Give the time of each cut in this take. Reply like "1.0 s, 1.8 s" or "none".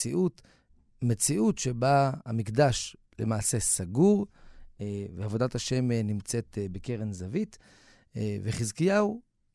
none